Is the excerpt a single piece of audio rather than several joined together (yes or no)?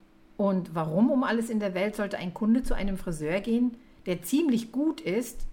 yes